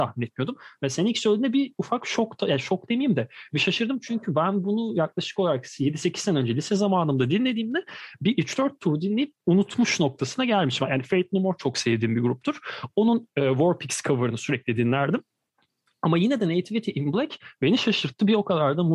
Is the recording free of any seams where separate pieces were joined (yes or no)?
yes